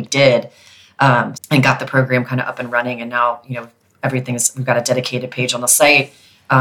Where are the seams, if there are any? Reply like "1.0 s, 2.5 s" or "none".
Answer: 1.3 s